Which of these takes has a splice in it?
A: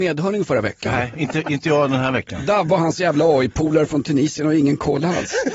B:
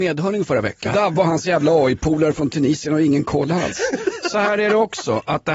B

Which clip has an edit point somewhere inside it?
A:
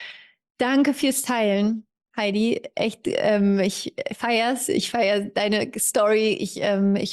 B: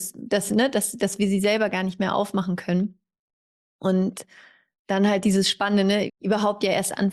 B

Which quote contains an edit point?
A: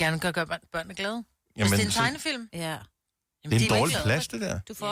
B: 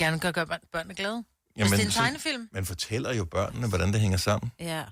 A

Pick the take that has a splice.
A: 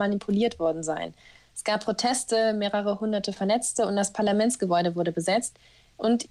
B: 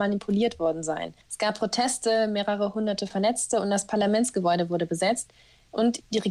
B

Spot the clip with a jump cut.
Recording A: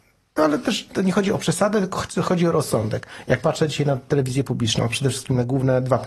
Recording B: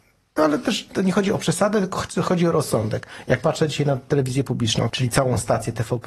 B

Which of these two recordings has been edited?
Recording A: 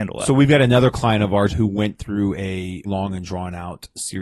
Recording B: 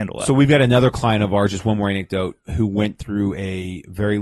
A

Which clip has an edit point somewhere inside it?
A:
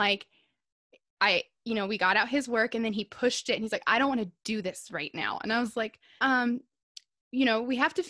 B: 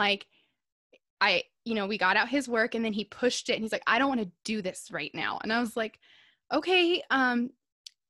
A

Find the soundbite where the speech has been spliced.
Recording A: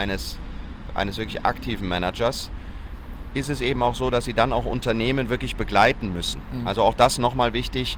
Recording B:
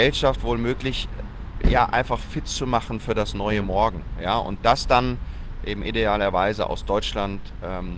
A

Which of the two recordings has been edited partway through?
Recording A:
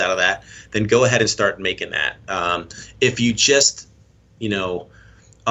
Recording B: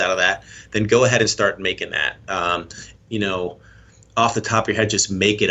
B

